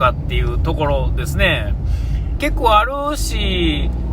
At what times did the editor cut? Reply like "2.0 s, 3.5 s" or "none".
2.4 s